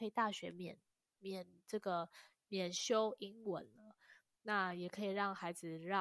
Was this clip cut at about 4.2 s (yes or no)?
no